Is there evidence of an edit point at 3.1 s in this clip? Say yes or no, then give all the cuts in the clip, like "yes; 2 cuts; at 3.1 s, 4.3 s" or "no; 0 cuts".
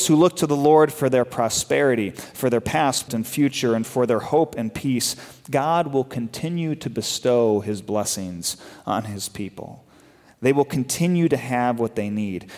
yes; 1 cut; at 3.1 s